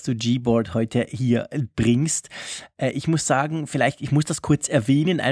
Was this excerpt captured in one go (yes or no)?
yes